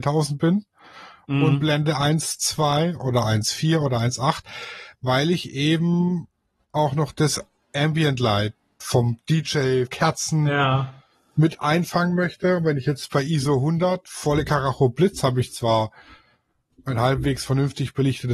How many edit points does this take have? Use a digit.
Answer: 1